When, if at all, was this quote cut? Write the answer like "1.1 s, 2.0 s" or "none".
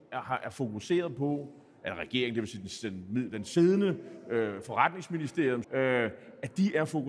3.3 s, 5.6 s